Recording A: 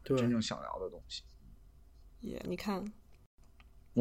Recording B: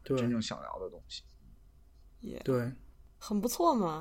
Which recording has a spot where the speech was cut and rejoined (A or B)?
A